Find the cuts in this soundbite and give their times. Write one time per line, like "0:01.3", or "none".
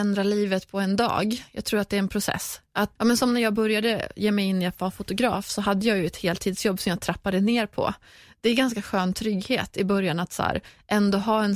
0:03.0